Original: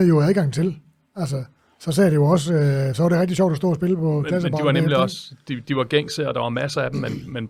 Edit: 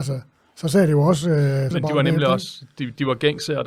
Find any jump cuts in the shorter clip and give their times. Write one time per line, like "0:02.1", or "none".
0:01.7